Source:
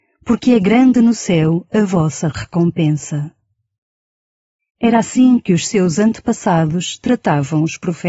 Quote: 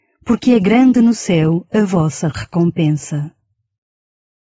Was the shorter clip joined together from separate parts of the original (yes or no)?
no